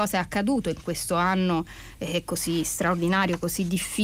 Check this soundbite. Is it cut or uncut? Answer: uncut